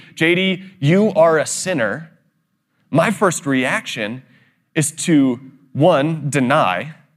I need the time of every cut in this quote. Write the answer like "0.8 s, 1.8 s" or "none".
none